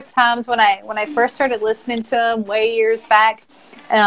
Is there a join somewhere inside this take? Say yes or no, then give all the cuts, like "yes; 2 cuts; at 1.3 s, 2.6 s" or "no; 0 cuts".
no; 0 cuts